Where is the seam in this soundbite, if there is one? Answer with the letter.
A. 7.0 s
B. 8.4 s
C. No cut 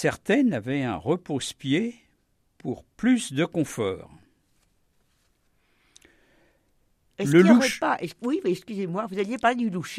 C